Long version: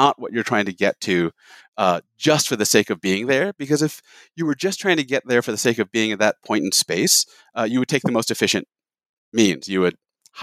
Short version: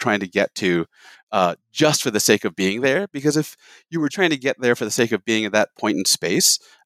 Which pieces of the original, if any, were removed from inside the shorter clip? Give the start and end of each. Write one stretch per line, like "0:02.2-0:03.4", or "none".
0:04.6-0:04.8